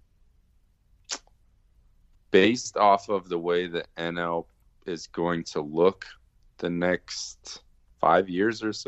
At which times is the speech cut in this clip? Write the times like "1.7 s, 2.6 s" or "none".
8.0 s